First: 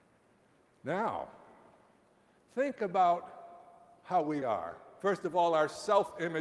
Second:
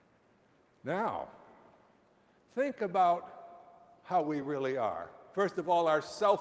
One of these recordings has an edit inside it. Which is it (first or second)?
first